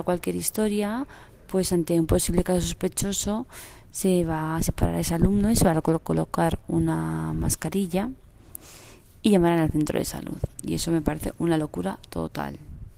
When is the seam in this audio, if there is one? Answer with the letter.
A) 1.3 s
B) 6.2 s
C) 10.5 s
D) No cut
C